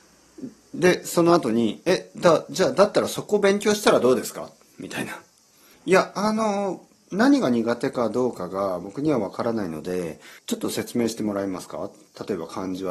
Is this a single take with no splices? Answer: no; 2 cuts; at 5.7 s, 10.4 s

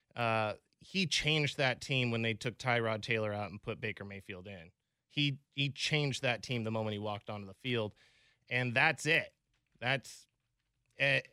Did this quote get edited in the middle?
no; 0 cuts

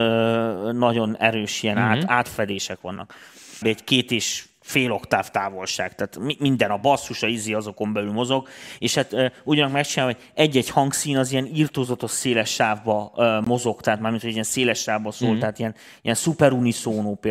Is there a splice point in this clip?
yes; 1 cut; at 3.6 s

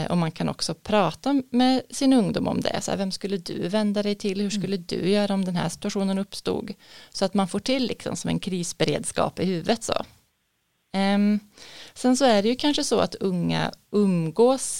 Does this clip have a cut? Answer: no; 0 cuts

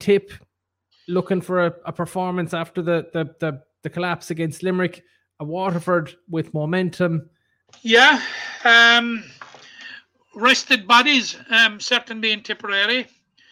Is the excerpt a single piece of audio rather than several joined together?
no; 1 cut; at 7.7 s

